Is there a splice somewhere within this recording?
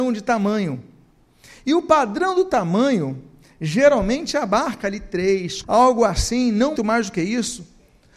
yes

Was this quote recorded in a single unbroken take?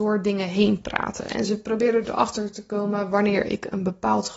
yes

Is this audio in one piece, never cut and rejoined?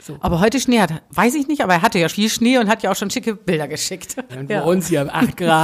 no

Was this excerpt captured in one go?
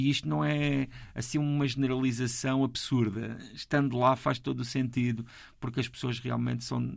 yes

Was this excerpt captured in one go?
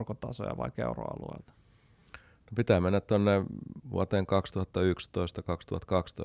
yes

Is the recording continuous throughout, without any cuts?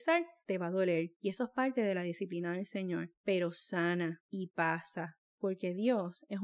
yes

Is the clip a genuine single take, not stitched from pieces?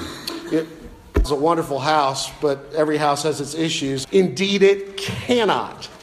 no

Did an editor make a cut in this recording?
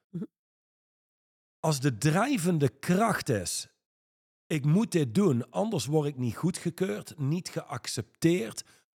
no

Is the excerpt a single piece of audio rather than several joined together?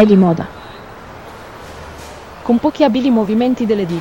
yes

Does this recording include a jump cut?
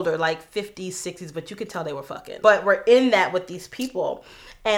yes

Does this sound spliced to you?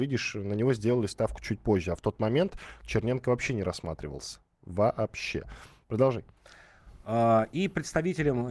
no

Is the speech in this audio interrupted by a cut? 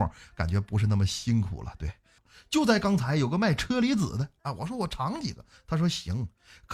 yes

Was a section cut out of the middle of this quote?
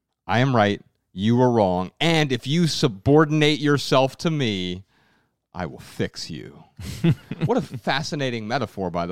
no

